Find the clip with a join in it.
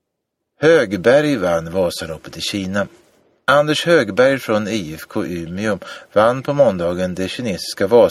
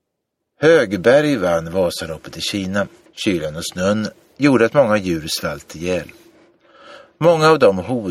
second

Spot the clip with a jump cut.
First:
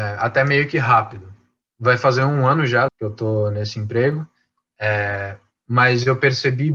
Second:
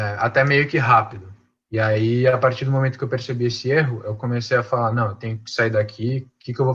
first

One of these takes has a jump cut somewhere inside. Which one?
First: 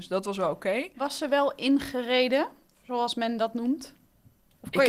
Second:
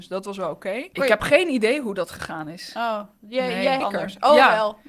second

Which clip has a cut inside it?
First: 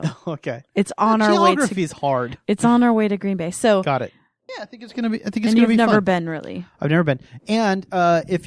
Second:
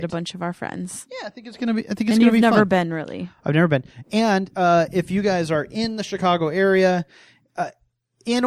first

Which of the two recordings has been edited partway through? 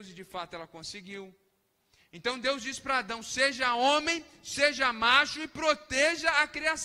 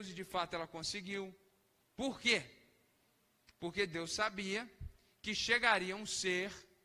second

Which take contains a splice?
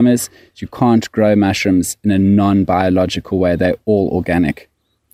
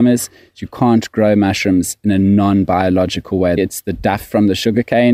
second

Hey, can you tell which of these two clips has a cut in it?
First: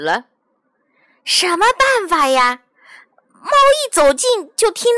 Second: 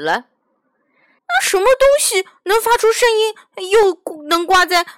second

